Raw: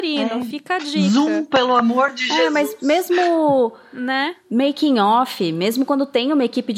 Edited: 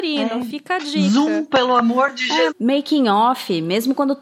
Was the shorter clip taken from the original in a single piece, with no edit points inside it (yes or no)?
no